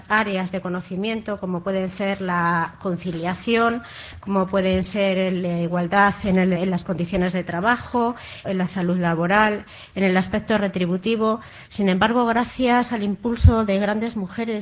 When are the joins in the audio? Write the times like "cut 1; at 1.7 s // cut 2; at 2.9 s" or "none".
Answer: cut 1; at 6.6 s // cut 2; at 8.4 s // cut 3; at 11.7 s